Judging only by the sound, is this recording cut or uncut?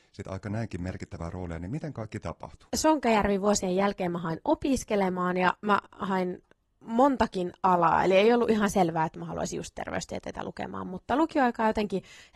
uncut